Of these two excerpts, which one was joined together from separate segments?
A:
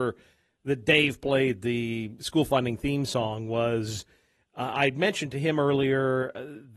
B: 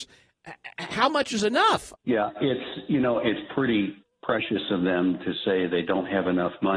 B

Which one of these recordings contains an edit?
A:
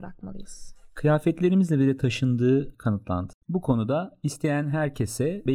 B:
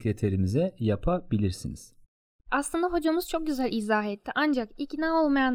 A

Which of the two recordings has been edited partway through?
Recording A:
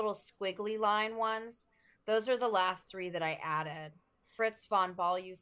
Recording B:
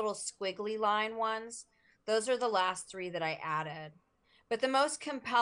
A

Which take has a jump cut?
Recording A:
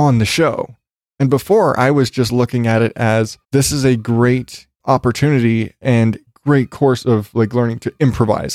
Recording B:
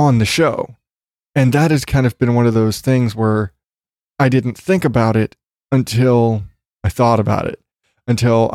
A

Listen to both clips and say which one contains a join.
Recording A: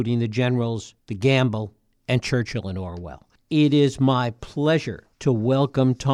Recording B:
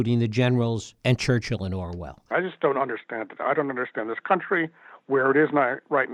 B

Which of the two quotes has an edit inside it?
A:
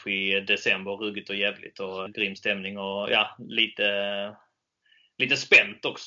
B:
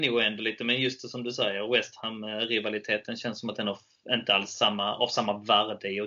A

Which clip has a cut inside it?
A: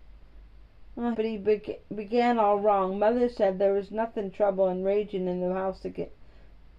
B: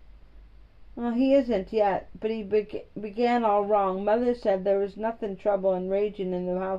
A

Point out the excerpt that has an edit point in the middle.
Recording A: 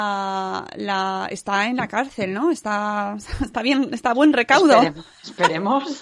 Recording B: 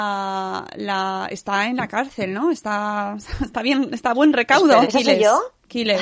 B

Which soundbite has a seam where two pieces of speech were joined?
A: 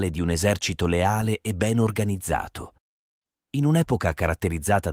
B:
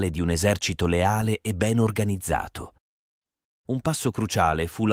B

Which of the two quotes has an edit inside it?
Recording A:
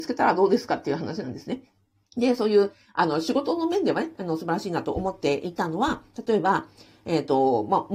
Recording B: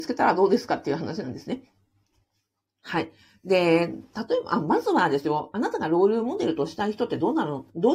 A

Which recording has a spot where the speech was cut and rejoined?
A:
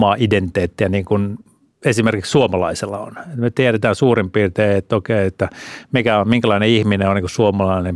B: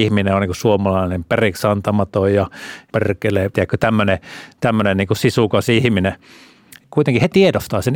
B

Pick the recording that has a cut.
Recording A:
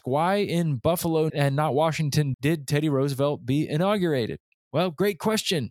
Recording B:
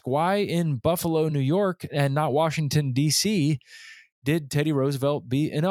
A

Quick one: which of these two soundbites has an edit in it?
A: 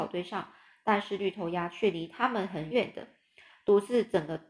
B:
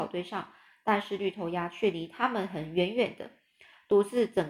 A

